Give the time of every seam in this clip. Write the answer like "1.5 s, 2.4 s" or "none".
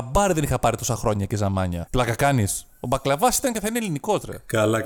1.9 s